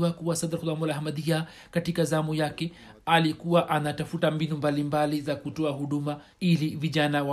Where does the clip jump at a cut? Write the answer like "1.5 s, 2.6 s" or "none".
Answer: 6.3 s